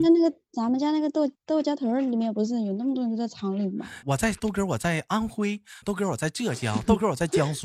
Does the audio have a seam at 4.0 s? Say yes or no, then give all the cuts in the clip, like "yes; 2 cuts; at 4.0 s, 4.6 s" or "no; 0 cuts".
yes; 2 cuts; at 4.0 s, 5.8 s